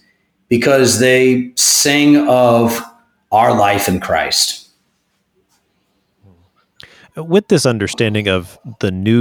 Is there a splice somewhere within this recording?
no; 0 cuts

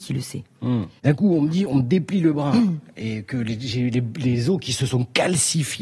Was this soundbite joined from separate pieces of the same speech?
yes; 1 cut; at 1.0 s

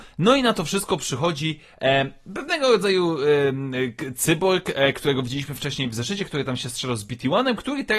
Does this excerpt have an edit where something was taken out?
no; 0 cuts

